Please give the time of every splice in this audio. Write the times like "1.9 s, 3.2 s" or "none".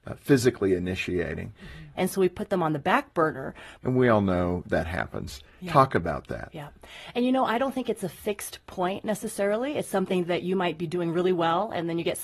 2.0 s, 3.8 s